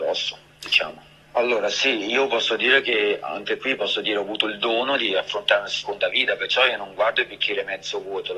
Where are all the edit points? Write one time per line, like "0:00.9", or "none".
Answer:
0:01.2